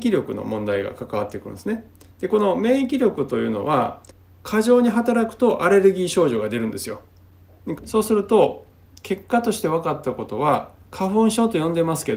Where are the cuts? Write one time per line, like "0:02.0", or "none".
0:07.8
0:10.8